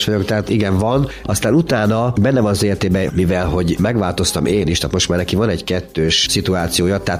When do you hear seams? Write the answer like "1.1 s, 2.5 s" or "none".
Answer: 1.2 s, 3.1 s

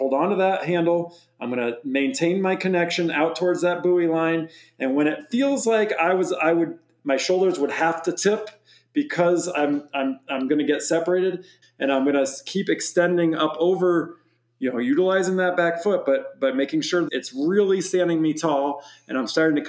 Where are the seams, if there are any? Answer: 11.6 s, 17.1 s

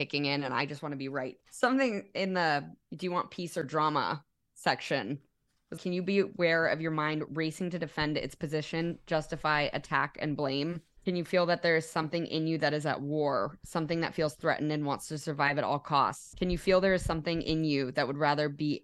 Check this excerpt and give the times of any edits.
5.8 s

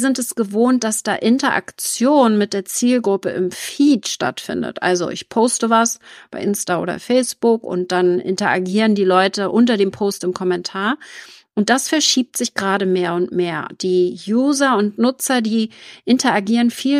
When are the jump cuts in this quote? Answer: none

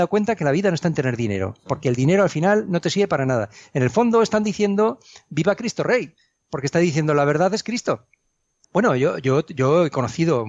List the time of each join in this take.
8.6 s

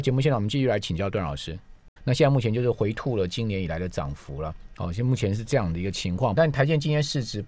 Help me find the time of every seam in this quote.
2.0 s, 6.3 s

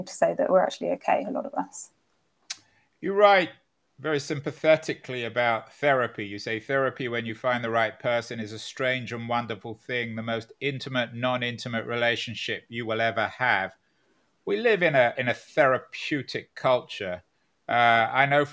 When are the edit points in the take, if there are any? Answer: none

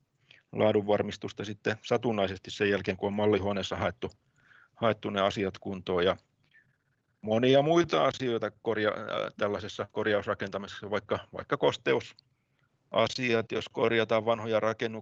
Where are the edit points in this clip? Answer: none

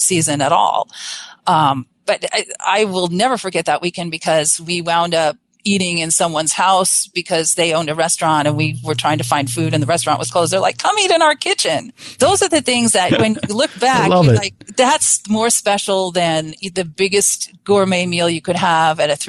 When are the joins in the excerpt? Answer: none

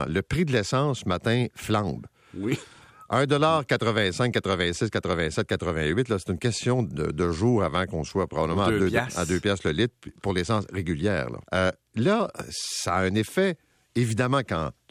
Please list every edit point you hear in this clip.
11.4 s

